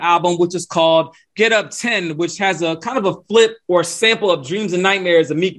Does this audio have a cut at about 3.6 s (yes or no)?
yes